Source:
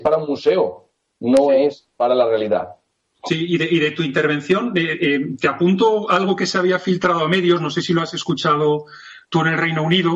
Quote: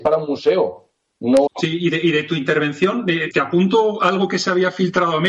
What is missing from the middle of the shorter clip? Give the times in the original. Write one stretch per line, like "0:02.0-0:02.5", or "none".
0:01.5-0:03.1
0:05.0-0:05.4